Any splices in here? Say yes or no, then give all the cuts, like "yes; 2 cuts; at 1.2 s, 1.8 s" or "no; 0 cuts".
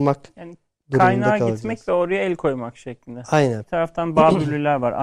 yes; 1 cut; at 3.6 s